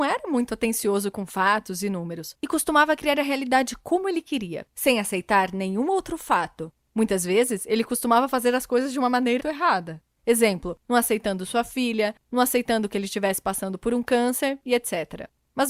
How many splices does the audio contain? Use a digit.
1